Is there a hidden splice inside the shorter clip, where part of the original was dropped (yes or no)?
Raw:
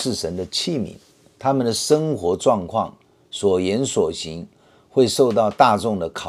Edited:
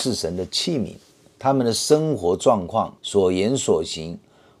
yes